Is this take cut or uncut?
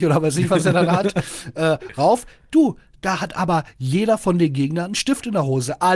uncut